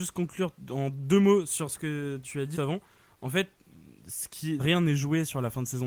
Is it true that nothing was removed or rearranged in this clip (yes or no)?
no